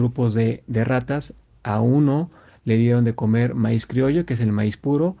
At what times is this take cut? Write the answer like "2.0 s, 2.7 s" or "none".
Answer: none